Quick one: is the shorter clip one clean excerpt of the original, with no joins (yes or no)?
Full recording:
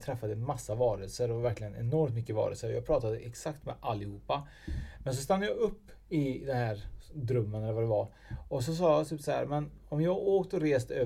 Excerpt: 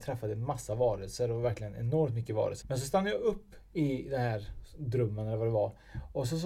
no